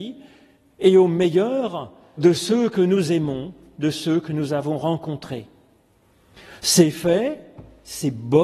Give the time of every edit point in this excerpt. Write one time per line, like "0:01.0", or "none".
0:02.2

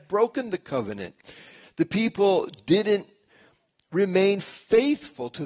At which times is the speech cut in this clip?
0:01.6

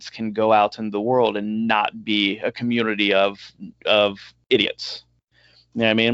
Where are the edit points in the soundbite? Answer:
none

